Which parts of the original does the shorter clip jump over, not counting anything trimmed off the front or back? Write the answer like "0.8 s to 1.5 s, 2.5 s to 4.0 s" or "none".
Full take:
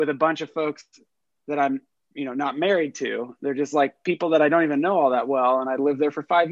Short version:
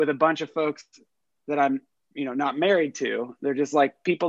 none